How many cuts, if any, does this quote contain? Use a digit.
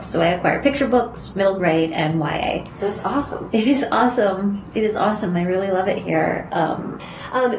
1